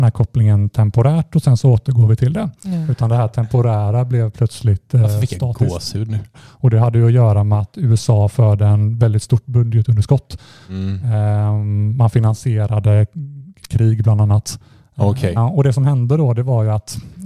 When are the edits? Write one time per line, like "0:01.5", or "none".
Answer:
0:02.6
0:06.3
0:15.4